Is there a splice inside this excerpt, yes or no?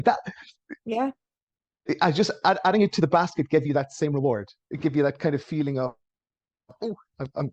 no